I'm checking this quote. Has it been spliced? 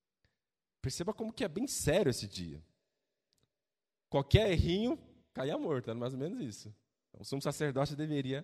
no; 0 cuts

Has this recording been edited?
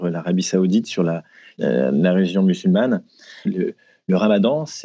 yes; 1 cut; at 3.5 s

